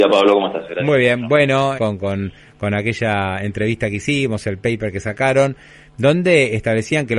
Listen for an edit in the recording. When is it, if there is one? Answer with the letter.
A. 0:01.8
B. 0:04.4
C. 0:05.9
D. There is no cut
A